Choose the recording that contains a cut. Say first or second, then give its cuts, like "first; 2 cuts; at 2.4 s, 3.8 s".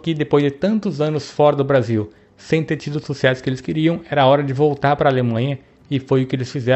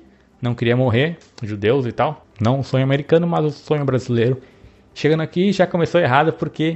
second; 1 cut; at 2.2 s